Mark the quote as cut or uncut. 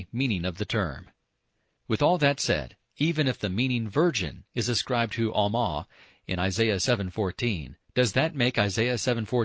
uncut